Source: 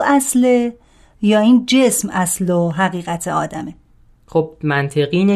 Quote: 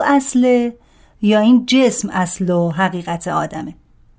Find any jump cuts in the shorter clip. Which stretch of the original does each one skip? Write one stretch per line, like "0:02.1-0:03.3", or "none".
none

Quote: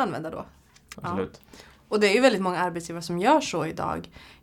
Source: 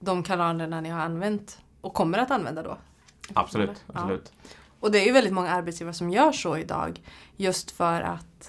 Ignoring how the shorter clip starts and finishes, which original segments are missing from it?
0:03.3-0:03.9

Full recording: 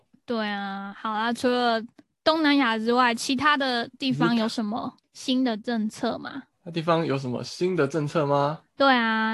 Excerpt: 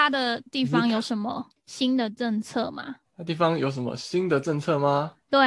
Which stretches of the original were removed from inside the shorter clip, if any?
none

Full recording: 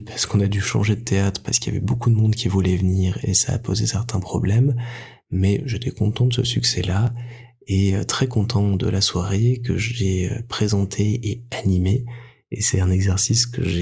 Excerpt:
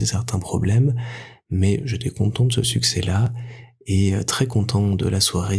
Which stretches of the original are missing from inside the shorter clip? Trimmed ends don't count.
none

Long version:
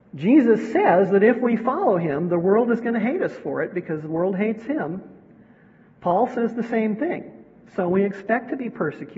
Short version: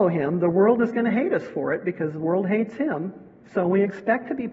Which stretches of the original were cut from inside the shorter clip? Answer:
0:05.3-0:07.6

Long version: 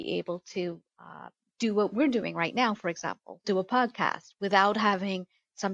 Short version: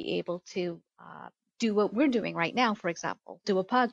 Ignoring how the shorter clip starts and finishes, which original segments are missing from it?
none

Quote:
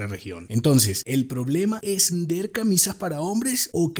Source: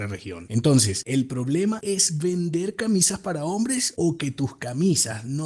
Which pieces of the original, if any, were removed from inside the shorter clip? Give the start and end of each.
0:02.1-0:02.3

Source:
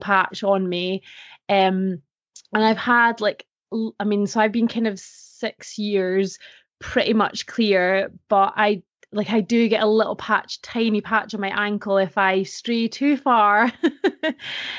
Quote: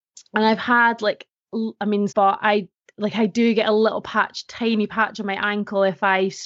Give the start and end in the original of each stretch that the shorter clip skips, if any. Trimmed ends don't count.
0:04.3-0:08.2

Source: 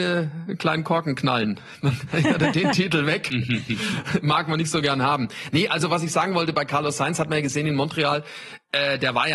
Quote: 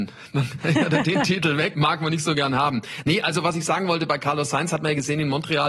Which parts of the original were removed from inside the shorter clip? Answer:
0:03.2-0:04.2

